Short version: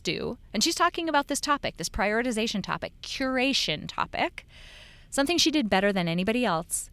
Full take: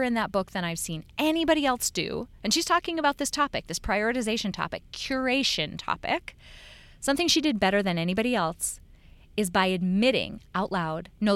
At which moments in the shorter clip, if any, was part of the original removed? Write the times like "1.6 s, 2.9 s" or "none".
none